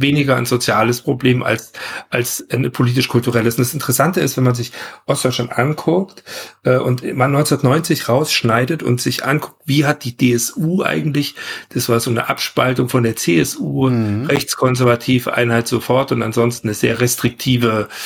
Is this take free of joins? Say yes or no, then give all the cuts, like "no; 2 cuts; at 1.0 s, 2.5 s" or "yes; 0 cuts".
yes; 0 cuts